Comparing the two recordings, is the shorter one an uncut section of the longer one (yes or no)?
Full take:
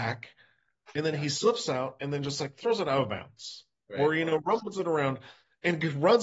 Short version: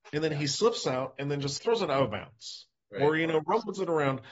no